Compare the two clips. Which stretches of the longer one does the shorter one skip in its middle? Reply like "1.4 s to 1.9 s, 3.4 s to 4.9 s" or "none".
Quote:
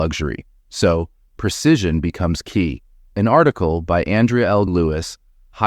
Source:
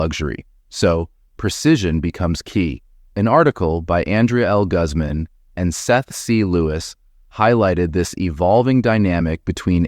4.7 s to 6.5 s